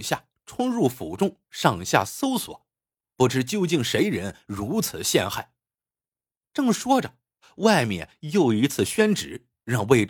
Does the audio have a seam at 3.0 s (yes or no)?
yes